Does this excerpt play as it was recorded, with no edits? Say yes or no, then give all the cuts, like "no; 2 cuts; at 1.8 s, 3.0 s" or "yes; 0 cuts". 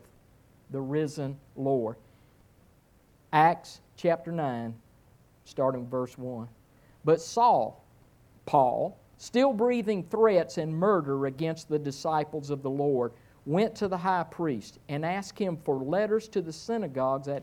yes; 0 cuts